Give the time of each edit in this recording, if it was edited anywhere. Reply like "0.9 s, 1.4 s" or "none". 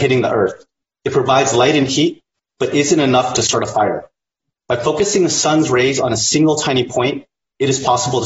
4.5 s